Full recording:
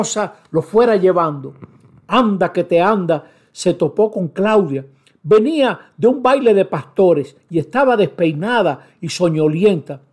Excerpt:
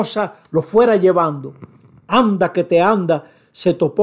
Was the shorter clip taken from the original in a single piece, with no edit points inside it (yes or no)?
yes